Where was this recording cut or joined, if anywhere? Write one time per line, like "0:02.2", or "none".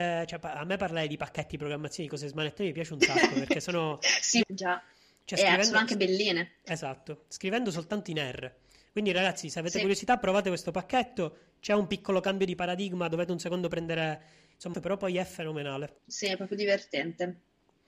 0:04.4
0:14.7
0:16.0